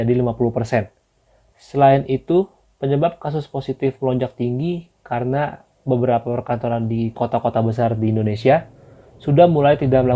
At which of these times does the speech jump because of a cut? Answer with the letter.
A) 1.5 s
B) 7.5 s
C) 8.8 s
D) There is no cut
A